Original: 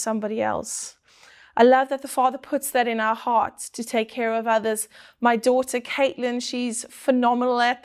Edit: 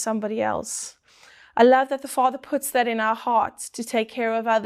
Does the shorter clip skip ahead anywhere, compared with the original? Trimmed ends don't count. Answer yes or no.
no